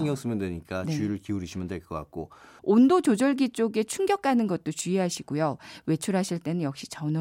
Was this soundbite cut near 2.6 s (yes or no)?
yes